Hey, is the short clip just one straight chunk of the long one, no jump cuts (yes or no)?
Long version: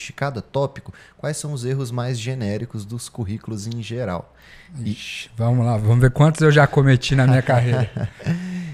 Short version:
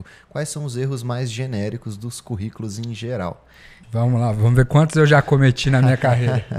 no